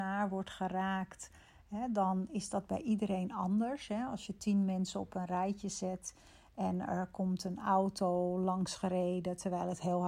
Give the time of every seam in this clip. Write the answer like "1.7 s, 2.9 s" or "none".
none